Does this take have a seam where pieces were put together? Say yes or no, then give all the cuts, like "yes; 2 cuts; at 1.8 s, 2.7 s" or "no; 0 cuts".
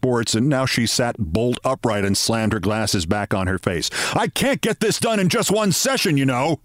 no; 0 cuts